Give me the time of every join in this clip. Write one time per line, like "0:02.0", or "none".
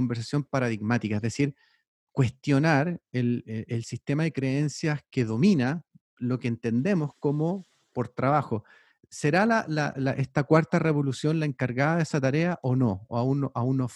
none